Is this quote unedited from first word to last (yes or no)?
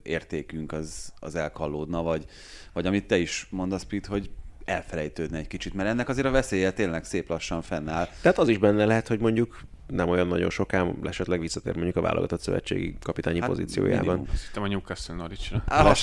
no